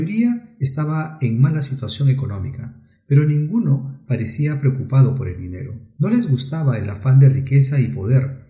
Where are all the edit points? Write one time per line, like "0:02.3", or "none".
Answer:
none